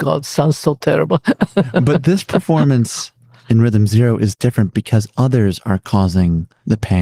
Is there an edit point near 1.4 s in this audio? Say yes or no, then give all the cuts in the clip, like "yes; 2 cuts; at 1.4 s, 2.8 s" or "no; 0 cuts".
no; 1 cut; at 4.7 s